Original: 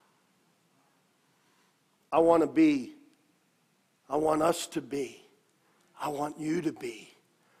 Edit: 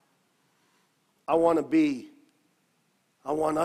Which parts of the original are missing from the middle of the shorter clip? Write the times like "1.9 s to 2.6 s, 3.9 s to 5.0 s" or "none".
none